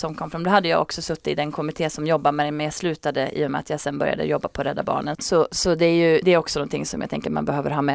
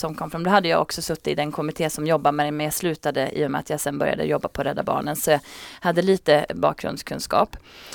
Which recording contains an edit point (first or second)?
first